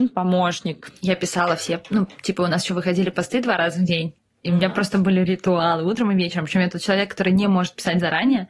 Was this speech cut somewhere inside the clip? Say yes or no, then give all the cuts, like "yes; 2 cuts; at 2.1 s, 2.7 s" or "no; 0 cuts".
no; 0 cuts